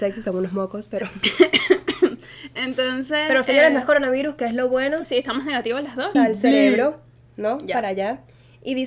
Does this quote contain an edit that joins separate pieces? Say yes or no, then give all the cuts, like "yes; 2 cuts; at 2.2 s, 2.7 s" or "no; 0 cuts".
yes; 1 cut; at 6.1 s